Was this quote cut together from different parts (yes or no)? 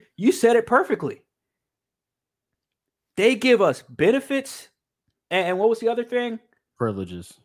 no